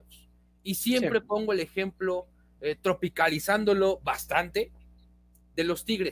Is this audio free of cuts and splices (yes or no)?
yes